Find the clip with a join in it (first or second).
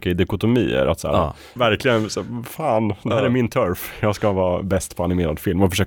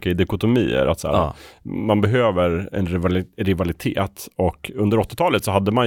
first